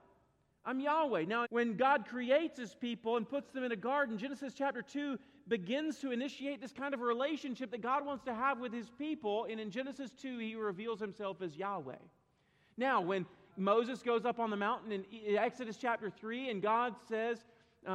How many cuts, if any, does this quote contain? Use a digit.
2